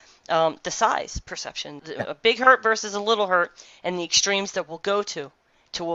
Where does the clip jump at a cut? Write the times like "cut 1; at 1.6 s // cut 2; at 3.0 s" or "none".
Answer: cut 1; at 1.8 s

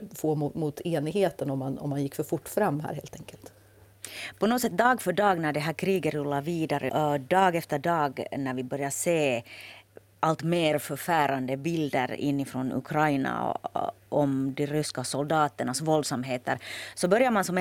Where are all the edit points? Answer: cut 1; at 6.9 s // cut 2; at 14.0 s

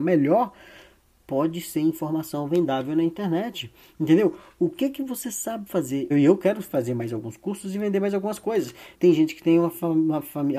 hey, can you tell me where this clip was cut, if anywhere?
cut 1; at 6.1 s // cut 2; at 8.9 s

